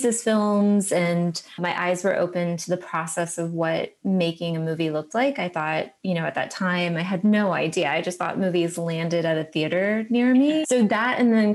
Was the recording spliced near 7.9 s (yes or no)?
no